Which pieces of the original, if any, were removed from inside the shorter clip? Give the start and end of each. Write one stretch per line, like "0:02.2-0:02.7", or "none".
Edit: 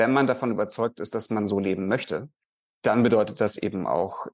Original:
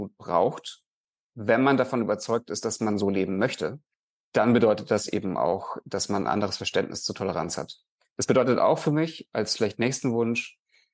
none